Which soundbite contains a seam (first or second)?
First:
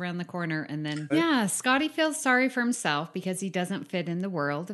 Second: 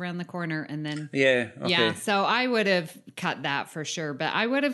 first